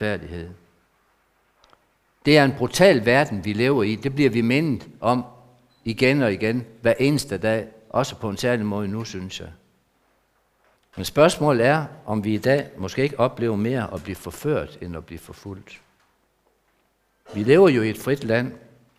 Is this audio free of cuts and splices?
no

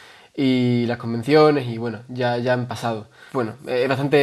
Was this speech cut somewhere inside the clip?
yes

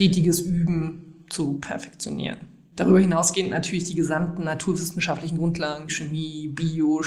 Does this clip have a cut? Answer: yes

